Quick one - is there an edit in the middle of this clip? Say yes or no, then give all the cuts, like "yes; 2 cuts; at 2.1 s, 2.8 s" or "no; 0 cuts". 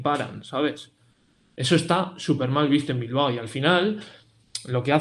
no; 0 cuts